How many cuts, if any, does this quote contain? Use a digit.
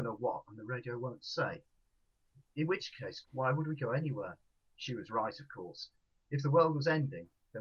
2